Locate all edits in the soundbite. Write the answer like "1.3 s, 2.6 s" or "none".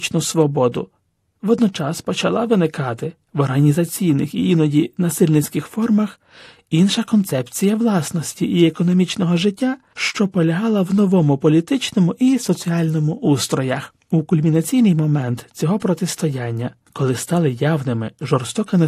none